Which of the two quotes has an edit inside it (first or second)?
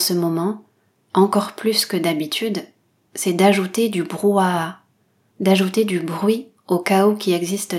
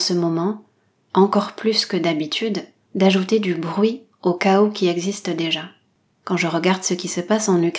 second